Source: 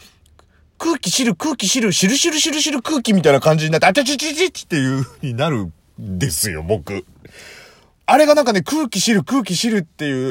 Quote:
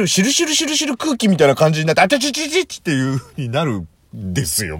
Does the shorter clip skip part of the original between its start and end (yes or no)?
no